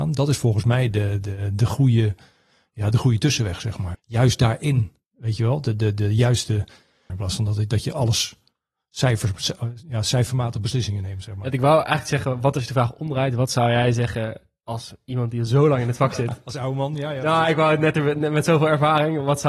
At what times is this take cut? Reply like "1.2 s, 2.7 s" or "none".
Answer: 3.9 s, 7.1 s